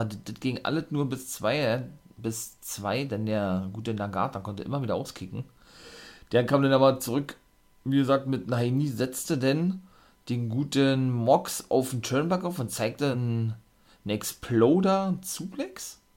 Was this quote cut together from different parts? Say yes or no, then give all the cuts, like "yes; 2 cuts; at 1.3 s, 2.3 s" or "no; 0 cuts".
no; 0 cuts